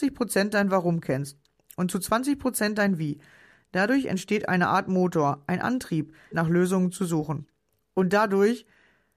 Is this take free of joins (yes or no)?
no